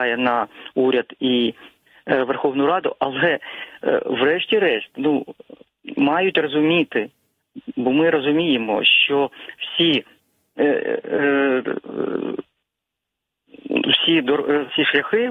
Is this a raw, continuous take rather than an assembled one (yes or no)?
yes